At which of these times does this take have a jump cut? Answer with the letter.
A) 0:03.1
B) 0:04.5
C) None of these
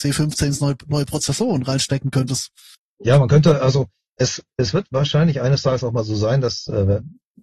C